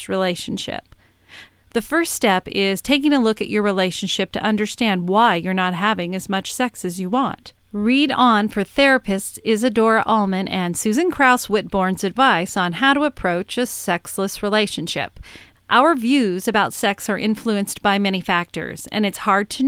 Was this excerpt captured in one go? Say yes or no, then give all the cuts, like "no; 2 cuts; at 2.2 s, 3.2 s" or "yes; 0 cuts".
no; 2 cuts; at 1.5 s, 15.5 s